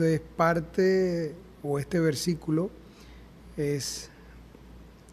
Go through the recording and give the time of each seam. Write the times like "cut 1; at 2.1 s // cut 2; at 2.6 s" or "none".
none